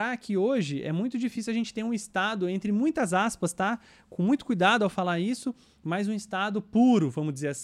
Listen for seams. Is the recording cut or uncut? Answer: uncut